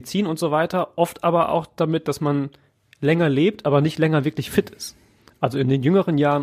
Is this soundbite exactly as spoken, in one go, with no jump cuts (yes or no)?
yes